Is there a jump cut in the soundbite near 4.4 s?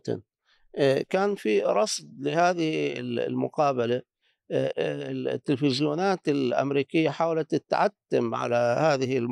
no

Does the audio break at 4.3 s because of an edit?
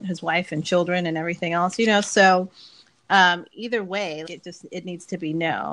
yes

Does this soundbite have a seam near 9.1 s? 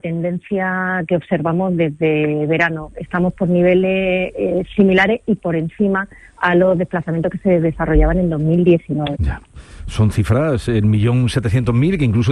yes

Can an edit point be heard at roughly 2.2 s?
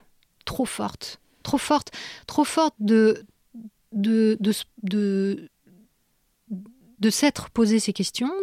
no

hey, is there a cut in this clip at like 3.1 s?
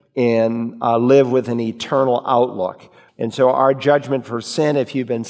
yes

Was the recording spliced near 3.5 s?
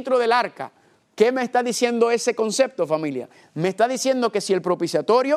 no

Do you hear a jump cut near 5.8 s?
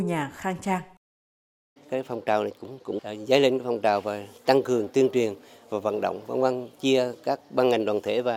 no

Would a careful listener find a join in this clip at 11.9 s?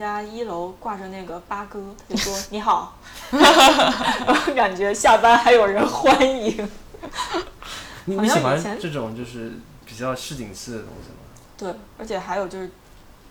yes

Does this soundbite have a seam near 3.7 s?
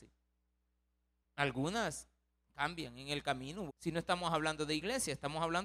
yes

